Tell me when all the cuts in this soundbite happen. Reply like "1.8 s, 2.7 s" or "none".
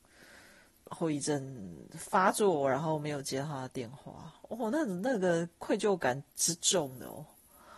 none